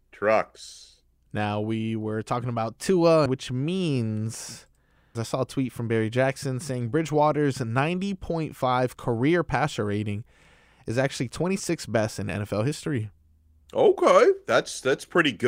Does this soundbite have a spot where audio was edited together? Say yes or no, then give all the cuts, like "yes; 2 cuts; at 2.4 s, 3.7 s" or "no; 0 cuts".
yes; 2 cuts; at 3.3 s, 5.1 s